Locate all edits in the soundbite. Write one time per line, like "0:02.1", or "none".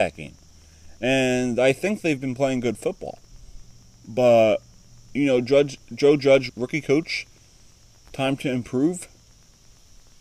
0:06.5